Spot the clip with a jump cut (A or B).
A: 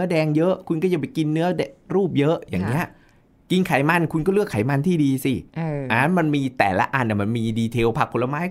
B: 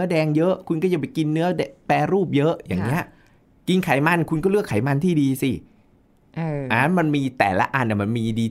A